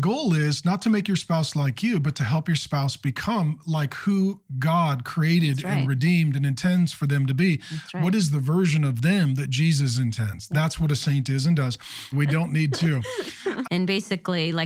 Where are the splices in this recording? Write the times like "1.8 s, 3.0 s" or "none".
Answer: 12.1 s, 13.6 s